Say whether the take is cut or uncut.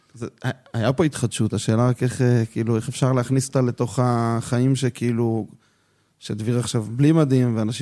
uncut